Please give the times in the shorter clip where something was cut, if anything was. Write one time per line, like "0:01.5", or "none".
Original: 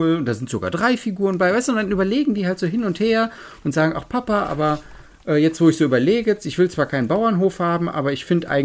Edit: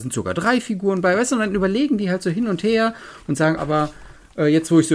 0:03.6